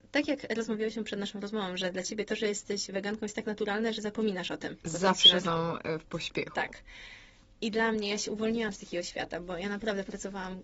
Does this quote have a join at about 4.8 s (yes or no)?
yes